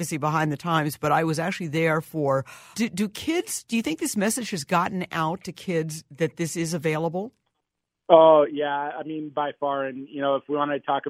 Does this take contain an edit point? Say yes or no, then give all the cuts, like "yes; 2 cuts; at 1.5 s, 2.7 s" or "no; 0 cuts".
yes; 1 cut; at 2.7 s